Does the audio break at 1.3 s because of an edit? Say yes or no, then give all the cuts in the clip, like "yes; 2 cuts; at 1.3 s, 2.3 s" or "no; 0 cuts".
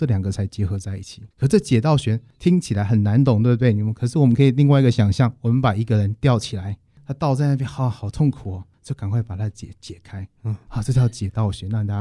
yes; 1 cut; at 1.3 s